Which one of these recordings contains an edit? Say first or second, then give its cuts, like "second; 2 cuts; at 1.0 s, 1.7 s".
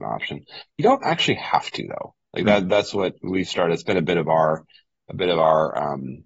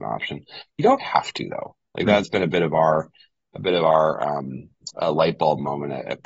second; 3 cuts; at 1.0 s, 2.2 s, 4.9 s